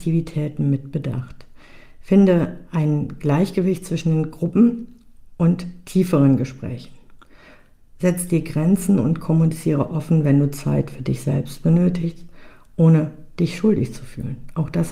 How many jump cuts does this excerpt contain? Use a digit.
0